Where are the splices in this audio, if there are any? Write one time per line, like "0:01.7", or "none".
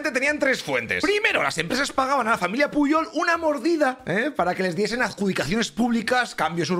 none